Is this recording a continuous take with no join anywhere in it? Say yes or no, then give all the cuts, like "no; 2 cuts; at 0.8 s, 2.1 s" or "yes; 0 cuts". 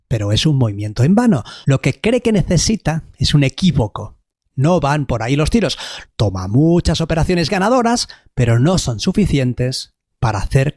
no; 2 cuts; at 1.6 s, 6.0 s